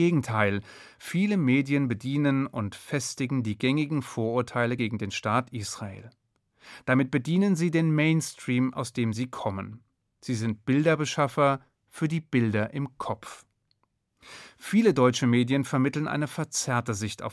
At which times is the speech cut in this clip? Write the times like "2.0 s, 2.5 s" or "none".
none